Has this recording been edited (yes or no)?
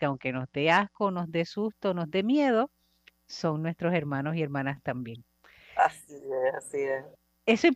no